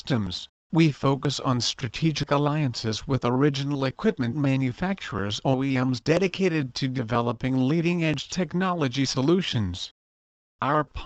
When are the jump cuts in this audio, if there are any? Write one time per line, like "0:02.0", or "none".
none